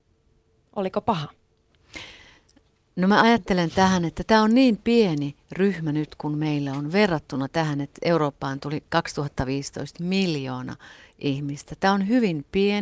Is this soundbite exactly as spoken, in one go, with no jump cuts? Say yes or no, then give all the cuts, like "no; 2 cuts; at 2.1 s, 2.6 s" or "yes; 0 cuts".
yes; 0 cuts